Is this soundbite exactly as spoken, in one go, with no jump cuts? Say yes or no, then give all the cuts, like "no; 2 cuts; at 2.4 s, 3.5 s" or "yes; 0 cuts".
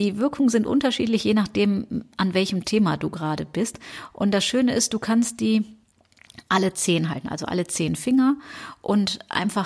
yes; 0 cuts